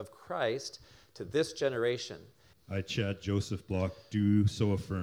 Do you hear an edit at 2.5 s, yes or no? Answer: yes